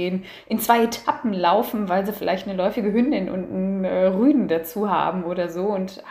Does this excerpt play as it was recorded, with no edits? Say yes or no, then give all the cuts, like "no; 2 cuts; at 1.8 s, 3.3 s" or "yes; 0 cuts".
yes; 0 cuts